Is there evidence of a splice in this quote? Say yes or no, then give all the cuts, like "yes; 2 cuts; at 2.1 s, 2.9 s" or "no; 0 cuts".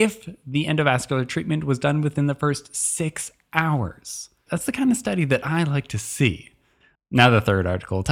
yes; 2 cuts; at 4.5 s, 6.9 s